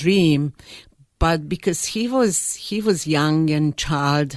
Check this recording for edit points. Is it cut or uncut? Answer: uncut